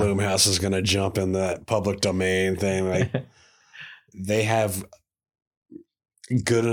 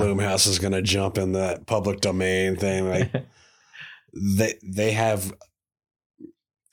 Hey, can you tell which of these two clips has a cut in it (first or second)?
first